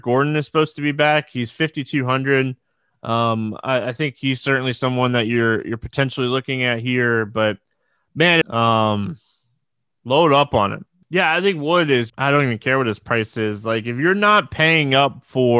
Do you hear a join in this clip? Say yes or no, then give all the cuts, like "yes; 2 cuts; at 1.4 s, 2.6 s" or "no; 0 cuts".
yes; 3 cuts; at 8.4 s, 11.0 s, 12.1 s